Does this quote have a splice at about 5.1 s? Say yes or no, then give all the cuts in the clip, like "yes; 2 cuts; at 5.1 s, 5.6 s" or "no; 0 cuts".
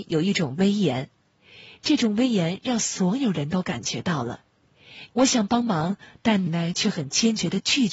yes; 2 cuts; at 5.1 s, 6.5 s